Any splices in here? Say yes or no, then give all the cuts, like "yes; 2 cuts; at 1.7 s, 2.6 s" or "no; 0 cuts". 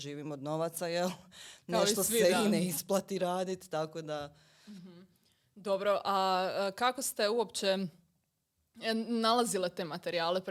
no; 0 cuts